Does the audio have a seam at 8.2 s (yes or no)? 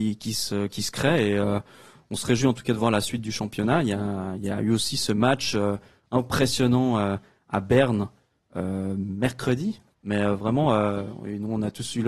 no